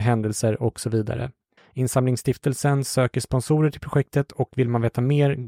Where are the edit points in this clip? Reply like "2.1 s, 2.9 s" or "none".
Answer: 1.6 s